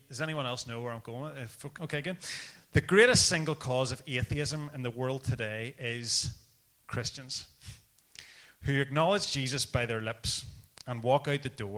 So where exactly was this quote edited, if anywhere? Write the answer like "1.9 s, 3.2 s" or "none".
1.8 s